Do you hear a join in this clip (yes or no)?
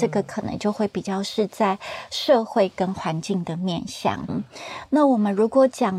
yes